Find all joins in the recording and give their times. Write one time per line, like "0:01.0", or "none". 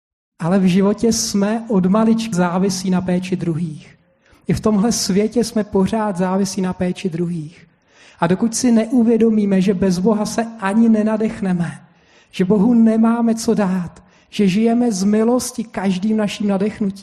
0:02.3